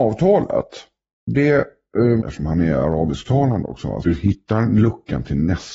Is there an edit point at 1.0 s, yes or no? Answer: no